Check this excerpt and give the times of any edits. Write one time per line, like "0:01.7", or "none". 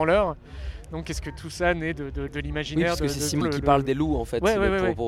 0:02.3
0:03.4

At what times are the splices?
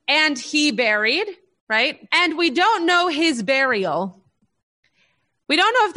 0:02.1

